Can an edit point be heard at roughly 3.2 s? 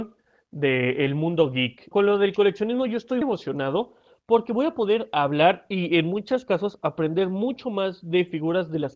yes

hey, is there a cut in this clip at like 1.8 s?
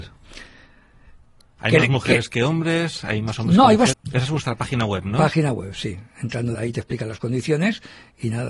no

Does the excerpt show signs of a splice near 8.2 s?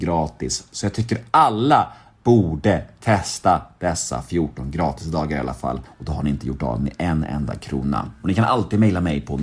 yes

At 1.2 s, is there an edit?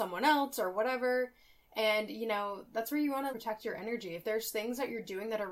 no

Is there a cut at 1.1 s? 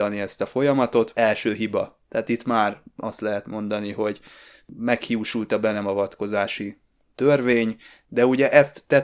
no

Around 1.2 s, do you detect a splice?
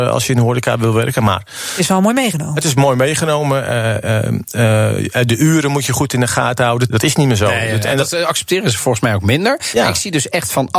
no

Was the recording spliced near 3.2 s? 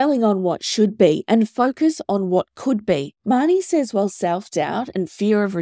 yes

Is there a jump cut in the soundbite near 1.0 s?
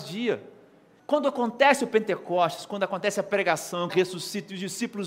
yes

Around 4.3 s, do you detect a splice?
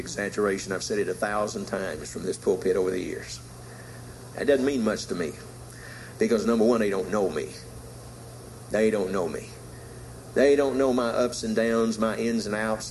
yes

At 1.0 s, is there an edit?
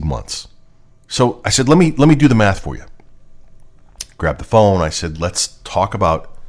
yes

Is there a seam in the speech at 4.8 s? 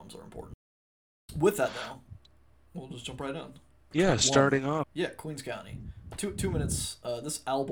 yes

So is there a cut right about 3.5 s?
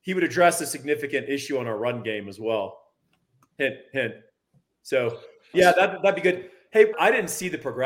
no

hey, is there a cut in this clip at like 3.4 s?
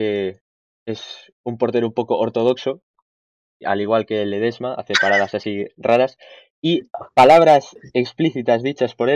no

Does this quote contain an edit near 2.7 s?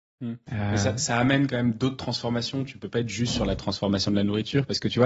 no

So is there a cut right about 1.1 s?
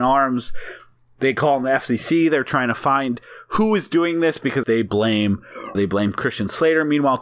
no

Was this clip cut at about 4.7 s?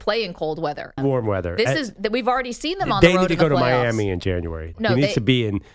yes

